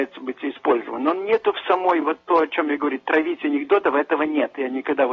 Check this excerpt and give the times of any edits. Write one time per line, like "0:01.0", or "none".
none